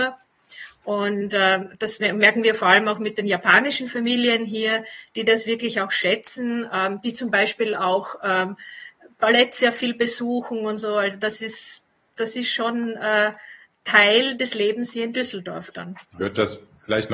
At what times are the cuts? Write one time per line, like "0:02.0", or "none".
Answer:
0:16.1